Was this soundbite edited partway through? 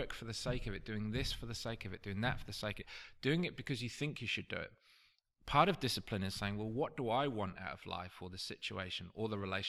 no; 0 cuts

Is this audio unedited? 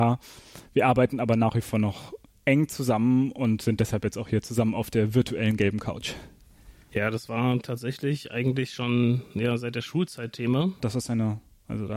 no; 2 cuts; at 6.9 s, 10.8 s

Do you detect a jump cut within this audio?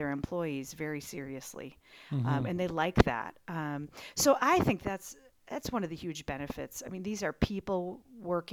no; 0 cuts

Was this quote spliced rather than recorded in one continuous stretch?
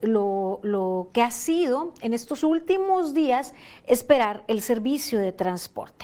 no; 0 cuts

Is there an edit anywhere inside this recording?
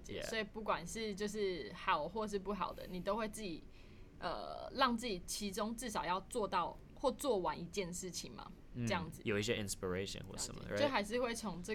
yes; 1 cut; at 9.2 s

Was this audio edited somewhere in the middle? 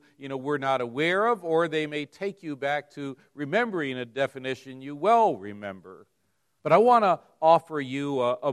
yes; 1 cut; at 6.6 s

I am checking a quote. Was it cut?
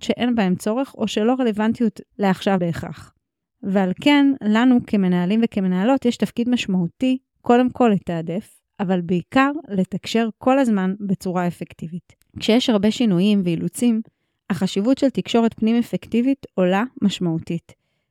no; 0 cuts

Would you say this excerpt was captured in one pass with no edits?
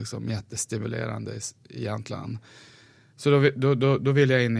yes; 0 cuts

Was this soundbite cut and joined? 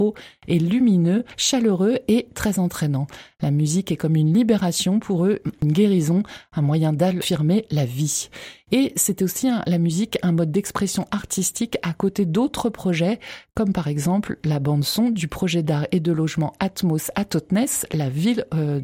no; 0 cuts

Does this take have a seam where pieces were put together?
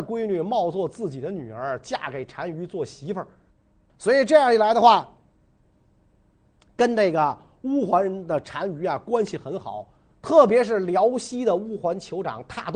no; 0 cuts

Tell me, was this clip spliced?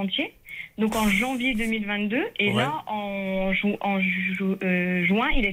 no; 0 cuts

